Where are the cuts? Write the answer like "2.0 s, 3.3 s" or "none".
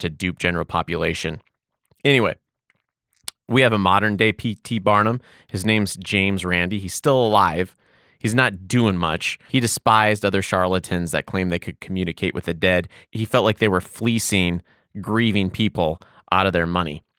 9.5 s